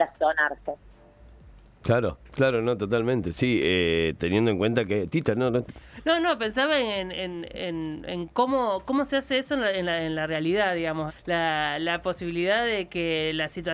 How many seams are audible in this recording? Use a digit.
1